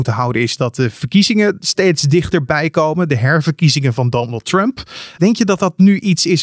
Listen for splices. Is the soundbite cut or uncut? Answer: cut